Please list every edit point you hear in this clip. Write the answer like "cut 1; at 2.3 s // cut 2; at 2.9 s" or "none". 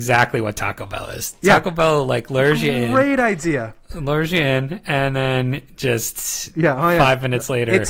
none